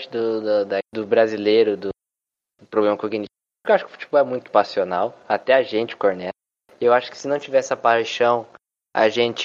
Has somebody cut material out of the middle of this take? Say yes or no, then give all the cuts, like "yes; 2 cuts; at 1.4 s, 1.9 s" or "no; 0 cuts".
no; 0 cuts